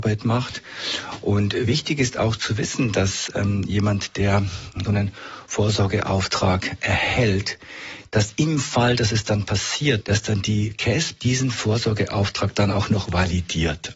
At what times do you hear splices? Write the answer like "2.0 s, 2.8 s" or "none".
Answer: 4.8 s, 10.0 s, 11.2 s

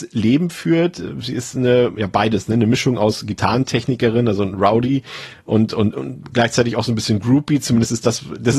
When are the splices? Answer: none

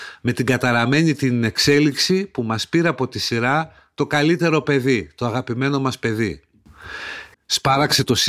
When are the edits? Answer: 7.3 s

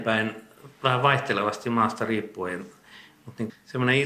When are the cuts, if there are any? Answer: none

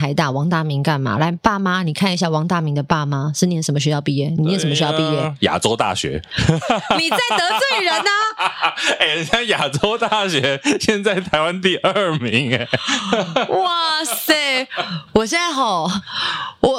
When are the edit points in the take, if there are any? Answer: none

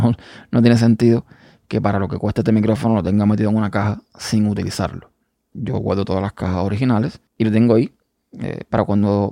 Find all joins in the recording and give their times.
5.5 s, 7.3 s

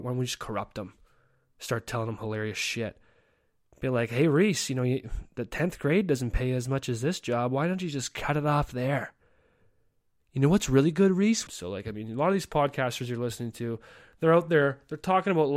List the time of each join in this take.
11.5 s

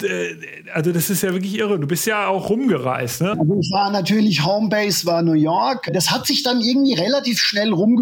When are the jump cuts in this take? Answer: 3.3 s, 5.9 s

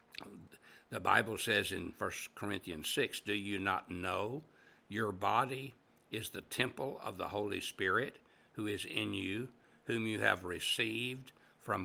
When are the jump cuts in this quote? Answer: none

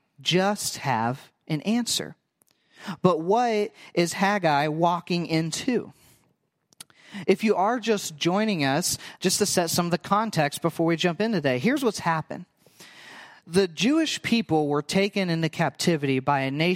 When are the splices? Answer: 9.2 s

